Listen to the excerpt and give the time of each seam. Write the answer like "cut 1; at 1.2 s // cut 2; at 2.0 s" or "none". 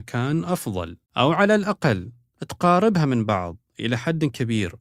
cut 1; at 1.1 s